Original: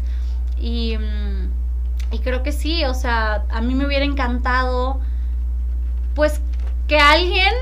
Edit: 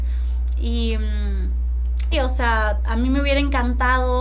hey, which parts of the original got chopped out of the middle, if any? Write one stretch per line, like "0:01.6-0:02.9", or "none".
0:02.1-0:02.8